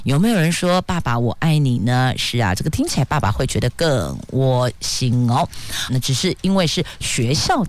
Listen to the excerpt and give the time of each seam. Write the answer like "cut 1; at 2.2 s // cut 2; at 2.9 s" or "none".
cut 1; at 5.9 s